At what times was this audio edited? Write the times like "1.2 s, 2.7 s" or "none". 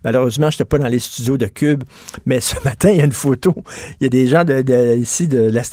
none

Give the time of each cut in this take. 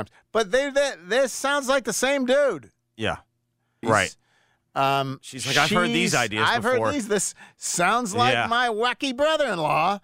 3.8 s

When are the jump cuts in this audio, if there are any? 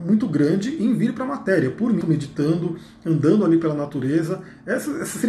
2.0 s

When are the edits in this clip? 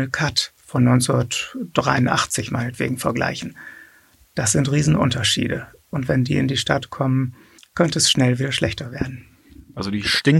none

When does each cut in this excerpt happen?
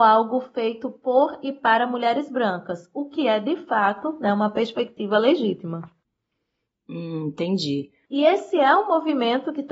8.1 s

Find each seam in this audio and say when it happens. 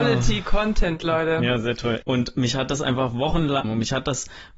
2.0 s, 3.6 s

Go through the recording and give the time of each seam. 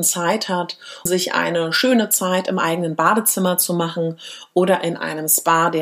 1.1 s

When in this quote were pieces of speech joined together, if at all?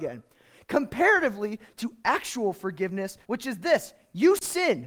3.2 s

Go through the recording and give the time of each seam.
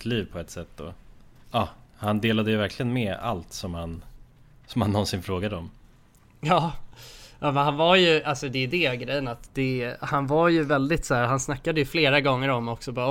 1.4 s

